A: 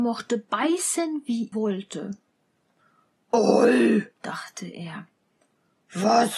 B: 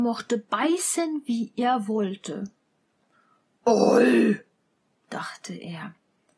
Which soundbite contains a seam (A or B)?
A